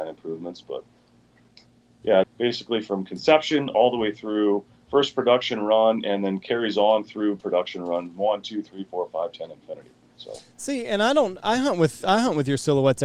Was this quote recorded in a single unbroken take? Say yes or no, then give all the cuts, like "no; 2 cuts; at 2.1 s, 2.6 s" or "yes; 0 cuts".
no; 1 cut; at 2.2 s